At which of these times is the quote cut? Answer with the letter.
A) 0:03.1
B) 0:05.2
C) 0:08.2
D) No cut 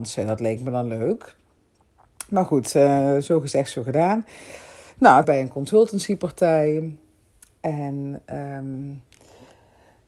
B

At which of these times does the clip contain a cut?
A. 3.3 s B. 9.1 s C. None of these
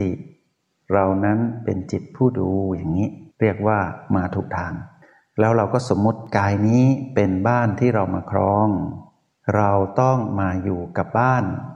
A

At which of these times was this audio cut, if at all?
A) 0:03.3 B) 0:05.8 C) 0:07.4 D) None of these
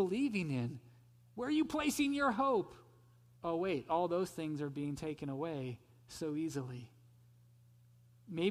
A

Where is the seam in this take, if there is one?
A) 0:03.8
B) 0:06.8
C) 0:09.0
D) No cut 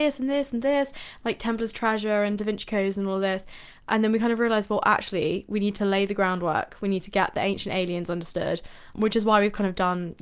C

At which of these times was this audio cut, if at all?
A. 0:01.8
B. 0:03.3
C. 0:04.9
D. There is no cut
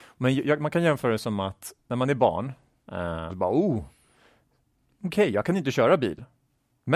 B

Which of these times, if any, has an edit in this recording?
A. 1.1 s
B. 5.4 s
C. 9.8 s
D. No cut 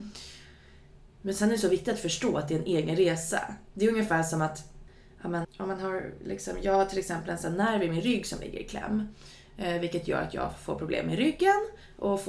B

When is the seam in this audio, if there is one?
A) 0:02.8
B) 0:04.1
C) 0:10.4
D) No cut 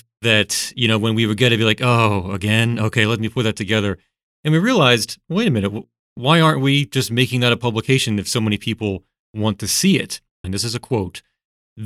C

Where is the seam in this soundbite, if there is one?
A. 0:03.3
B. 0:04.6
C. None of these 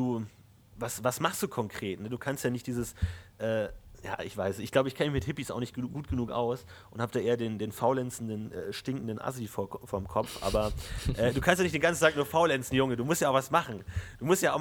C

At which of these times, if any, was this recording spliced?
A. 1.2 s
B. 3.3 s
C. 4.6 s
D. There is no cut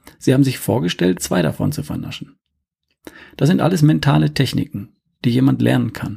A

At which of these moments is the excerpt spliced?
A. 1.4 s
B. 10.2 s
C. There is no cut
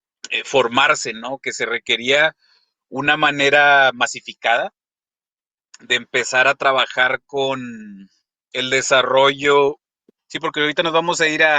B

